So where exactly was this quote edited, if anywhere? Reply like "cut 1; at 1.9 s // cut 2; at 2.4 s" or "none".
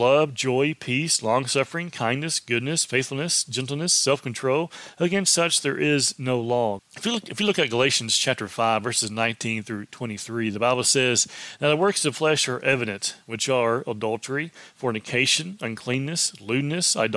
cut 1; at 6.8 s